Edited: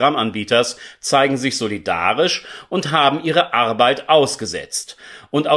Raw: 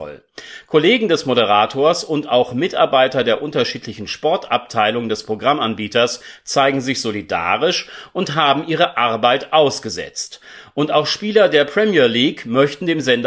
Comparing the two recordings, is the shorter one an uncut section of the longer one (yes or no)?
yes